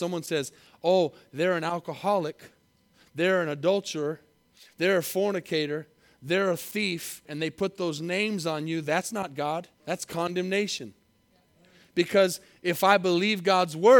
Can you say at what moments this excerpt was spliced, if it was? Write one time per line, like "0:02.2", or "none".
0:07.3
0:09.7